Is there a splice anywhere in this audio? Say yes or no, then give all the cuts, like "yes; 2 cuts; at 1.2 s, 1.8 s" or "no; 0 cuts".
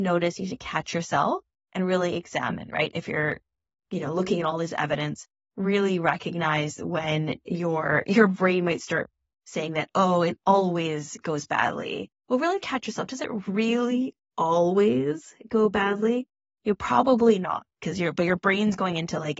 no; 0 cuts